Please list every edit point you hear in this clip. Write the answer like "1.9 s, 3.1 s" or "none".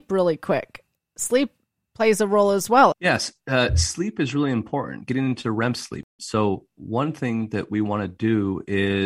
2.9 s